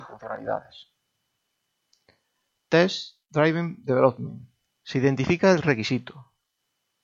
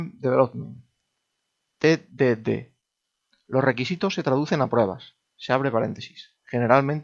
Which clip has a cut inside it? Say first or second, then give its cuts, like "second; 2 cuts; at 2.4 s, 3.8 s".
first; 1 cut; at 4.8 s